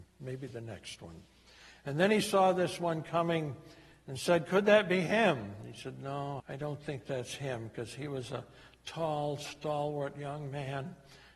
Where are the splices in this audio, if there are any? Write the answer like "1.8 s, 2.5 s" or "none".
6.4 s